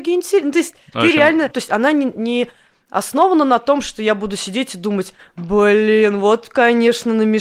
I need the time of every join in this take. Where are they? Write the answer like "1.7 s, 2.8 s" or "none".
1.5 s